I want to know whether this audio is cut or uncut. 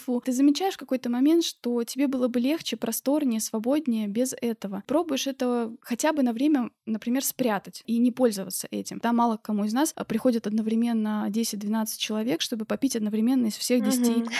cut